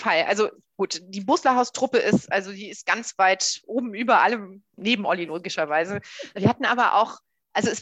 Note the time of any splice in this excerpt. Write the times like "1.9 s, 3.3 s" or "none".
4.8 s